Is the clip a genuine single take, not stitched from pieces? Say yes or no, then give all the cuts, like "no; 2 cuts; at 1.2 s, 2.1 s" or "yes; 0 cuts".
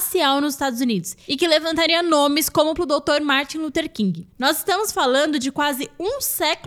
no; 1 cut; at 2.8 s